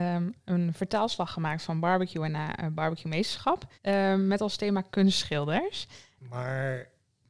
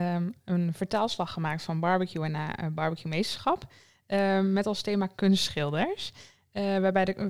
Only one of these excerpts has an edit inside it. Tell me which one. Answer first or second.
first